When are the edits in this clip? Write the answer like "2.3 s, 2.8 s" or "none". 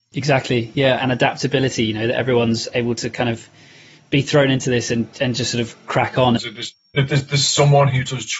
1.0 s, 6.4 s